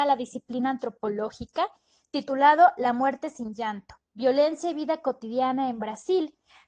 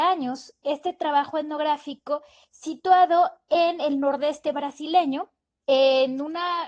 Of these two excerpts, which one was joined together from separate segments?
second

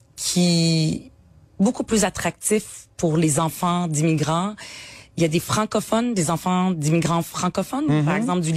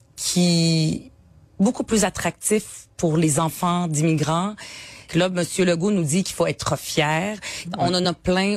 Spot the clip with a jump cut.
second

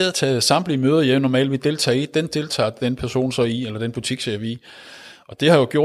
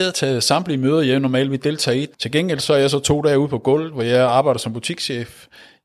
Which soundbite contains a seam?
second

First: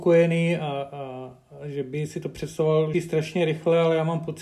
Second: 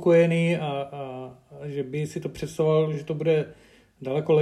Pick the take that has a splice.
first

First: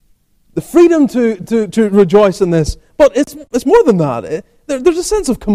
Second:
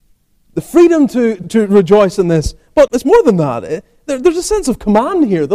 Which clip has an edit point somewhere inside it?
second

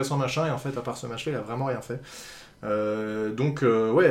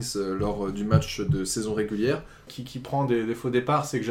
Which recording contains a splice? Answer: second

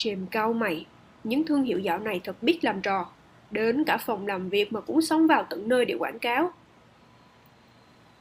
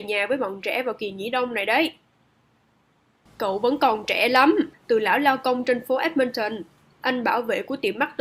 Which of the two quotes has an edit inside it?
second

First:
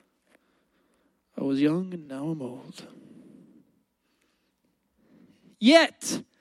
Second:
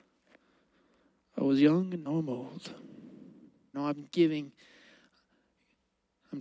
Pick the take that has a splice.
second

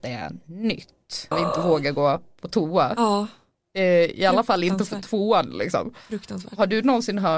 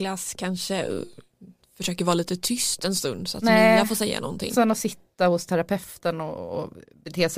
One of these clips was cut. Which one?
first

